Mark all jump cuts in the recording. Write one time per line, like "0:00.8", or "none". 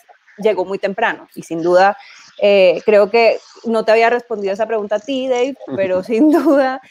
0:01.3
0:05.7